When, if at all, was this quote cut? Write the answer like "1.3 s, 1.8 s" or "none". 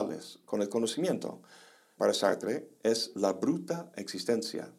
2.0 s